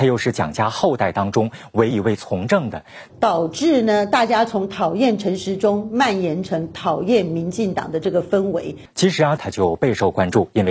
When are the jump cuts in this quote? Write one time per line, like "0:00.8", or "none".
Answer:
0:01.9
0:03.1
0:09.4